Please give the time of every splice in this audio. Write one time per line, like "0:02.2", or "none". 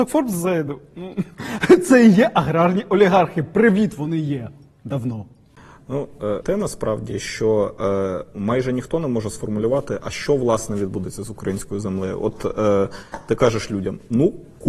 0:06.4